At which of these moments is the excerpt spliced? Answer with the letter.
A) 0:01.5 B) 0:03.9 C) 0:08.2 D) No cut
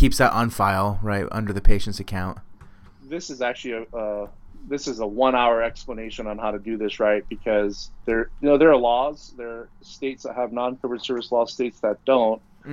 B